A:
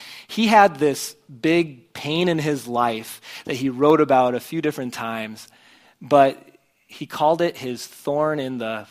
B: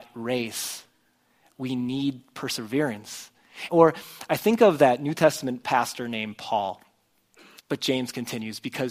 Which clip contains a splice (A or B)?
B